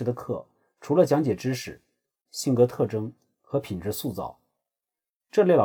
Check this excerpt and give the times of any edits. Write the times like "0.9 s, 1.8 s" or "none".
2.3 s